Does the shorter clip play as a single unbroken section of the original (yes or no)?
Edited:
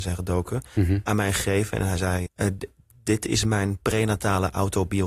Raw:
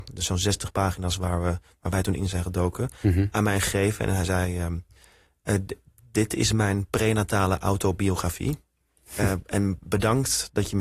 no